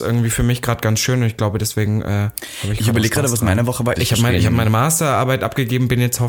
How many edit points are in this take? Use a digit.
1